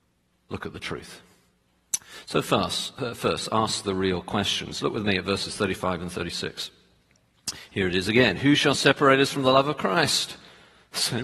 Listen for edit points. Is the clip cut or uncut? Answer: uncut